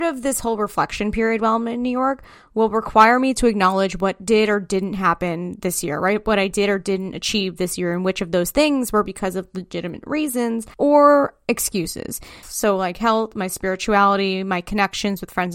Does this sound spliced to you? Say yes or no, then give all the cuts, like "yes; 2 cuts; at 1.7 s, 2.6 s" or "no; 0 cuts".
yes; 2 cuts; at 10.7 s, 12.4 s